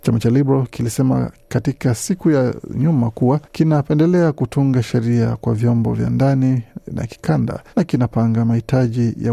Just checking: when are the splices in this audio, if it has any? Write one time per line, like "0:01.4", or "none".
0:03.4
0:07.7